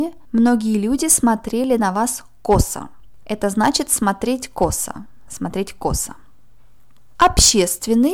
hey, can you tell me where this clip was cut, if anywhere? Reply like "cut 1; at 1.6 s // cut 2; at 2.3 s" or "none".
cut 1; at 3.2 s // cut 2; at 5.3 s